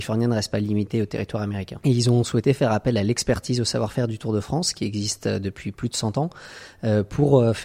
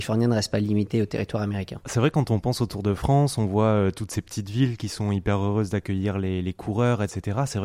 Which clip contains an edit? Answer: first; 1 cut; at 1.8 s

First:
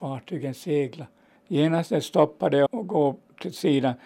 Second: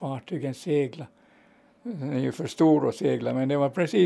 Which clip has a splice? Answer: first; 2 cuts; at 1.4 s, 2.7 s

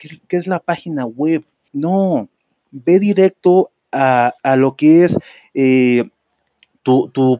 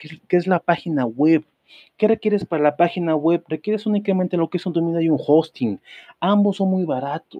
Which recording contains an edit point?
first; 2 cuts; at 1.7 s, 4.4 s

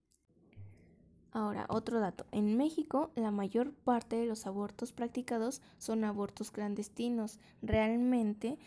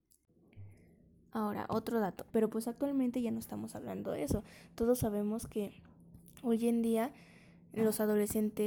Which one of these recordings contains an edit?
second; 1 cut; at 2.3 s

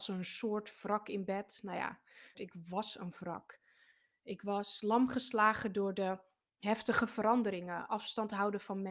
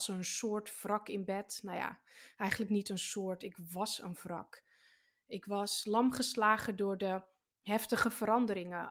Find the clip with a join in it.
first; 1 cut; at 2.3 s

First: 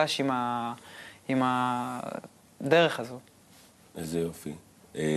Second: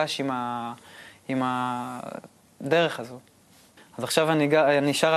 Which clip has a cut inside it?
second; 1 cut; at 3.8 s

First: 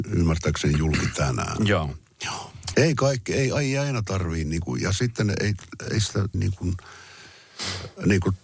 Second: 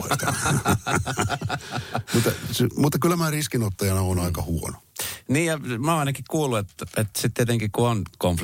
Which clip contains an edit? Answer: first; 2 cuts; at 2.7 s, 6.3 s

